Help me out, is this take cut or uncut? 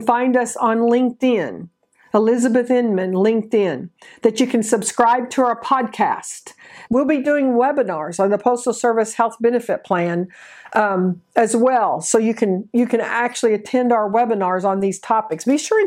cut